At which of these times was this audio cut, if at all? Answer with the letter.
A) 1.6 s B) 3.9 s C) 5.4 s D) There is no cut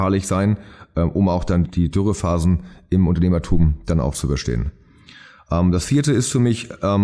A